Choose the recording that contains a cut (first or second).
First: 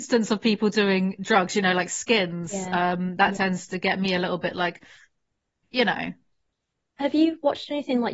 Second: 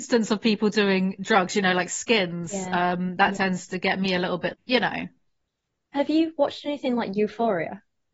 second